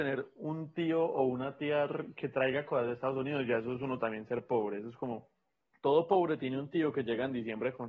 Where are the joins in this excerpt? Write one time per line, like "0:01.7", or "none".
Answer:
none